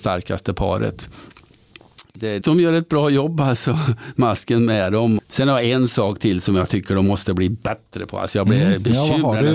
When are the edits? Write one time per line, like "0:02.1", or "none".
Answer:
0:02.4
0:05.2